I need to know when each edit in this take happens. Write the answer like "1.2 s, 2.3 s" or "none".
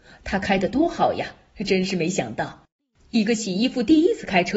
none